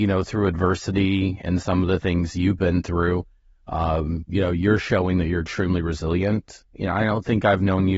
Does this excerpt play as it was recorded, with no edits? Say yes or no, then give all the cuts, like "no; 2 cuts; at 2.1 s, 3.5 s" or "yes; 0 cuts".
yes; 0 cuts